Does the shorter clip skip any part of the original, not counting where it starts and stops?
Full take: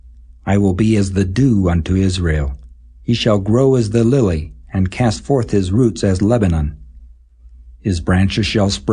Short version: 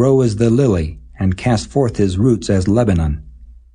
no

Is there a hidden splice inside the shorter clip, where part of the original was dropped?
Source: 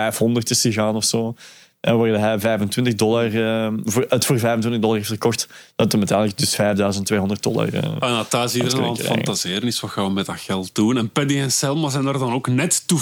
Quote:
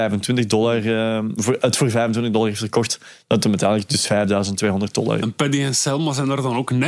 yes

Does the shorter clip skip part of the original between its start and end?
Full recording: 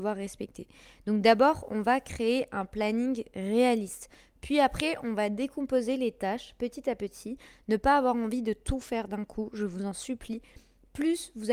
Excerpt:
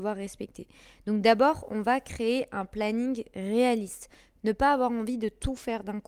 yes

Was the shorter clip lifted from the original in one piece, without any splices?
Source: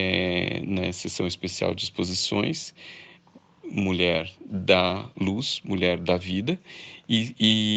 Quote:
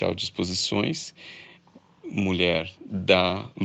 yes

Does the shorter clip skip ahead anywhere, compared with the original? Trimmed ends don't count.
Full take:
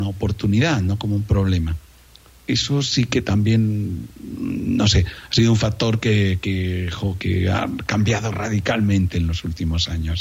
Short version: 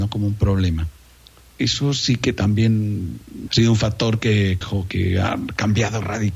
yes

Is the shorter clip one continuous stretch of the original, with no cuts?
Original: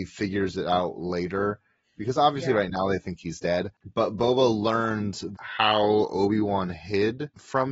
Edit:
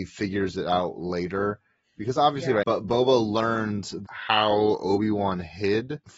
no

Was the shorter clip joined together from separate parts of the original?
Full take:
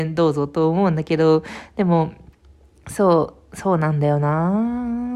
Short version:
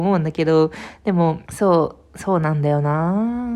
yes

